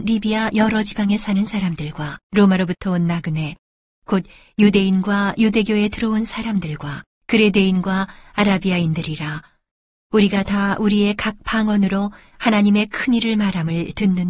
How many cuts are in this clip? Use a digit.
2